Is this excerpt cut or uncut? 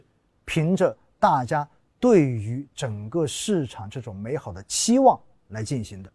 uncut